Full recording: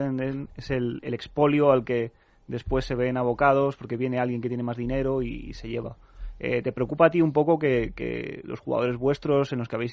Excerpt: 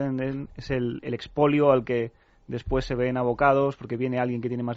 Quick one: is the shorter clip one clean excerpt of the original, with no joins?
yes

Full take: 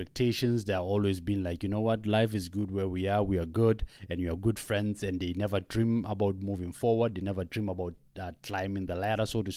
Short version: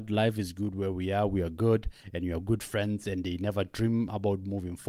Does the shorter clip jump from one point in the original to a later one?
no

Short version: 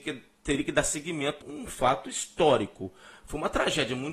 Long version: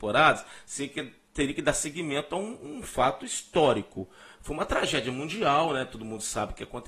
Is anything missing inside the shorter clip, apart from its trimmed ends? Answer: yes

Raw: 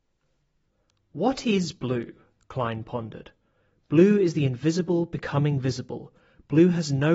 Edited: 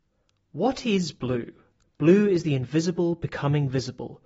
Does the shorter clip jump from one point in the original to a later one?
yes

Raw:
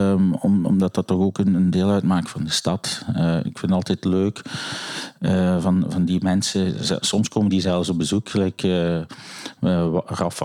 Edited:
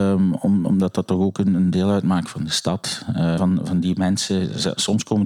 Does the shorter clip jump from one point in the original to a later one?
yes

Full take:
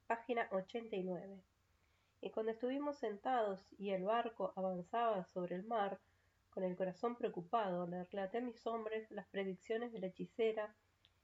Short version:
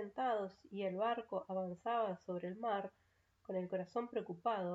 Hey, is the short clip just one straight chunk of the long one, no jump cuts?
yes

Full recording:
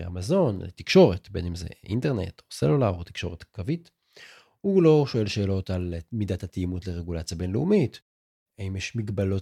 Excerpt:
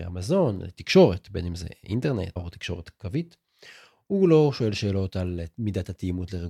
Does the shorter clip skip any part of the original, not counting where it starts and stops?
yes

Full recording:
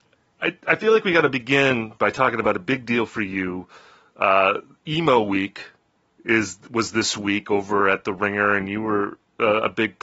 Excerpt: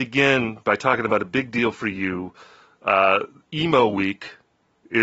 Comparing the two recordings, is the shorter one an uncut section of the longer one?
yes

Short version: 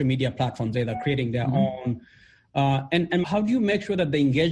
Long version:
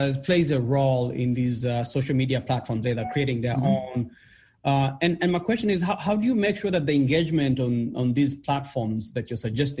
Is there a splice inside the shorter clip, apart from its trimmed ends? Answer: yes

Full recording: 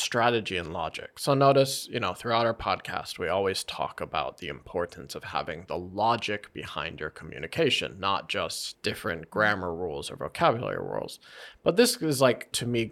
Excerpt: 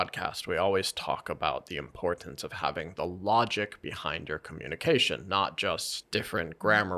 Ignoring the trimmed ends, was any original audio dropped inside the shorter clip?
no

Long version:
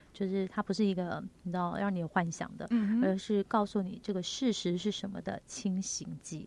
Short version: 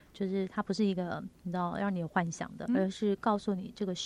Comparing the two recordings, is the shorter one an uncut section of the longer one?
no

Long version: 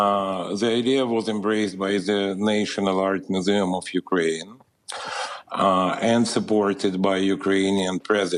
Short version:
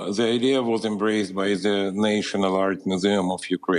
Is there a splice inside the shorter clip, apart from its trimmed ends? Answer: no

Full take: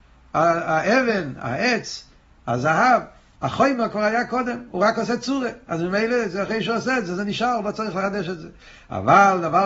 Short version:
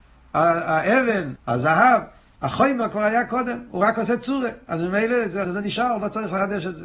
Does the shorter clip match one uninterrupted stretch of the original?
no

